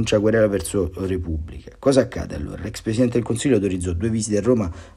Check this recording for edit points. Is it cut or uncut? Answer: uncut